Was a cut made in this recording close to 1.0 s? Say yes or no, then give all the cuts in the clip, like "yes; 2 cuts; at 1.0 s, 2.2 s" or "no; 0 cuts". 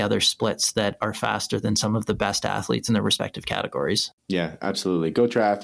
no; 1 cut; at 4.2 s